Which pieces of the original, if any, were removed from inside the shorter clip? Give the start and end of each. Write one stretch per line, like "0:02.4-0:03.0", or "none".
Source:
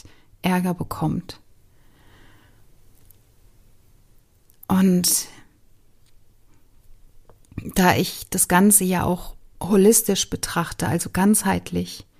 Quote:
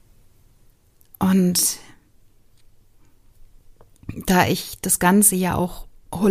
none